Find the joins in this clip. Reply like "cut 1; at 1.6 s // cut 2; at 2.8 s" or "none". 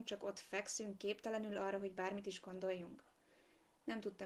none